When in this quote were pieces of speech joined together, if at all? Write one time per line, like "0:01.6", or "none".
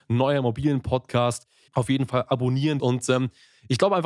0:01.7
0:02.8